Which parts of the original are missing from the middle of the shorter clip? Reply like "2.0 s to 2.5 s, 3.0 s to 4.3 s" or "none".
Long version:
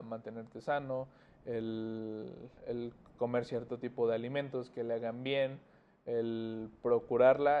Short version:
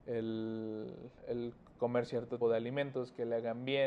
3.8 s to 4.0 s